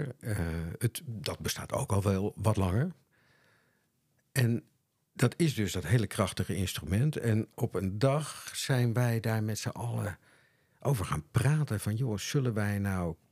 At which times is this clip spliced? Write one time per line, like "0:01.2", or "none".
none